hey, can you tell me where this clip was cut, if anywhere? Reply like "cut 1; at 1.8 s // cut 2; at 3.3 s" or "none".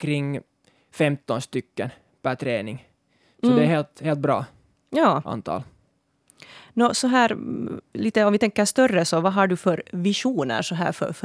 none

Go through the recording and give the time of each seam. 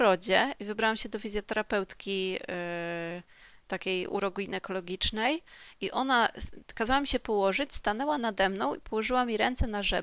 none

